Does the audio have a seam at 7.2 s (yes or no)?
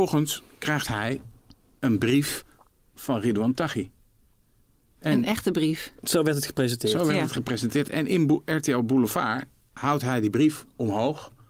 no